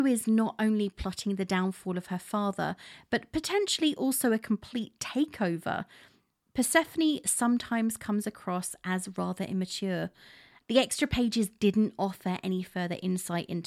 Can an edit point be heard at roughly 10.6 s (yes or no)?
yes